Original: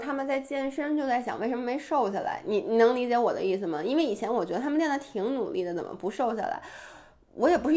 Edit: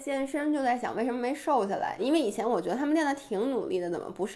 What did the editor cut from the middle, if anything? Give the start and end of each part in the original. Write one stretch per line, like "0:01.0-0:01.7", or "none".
0:02.4-0:03.8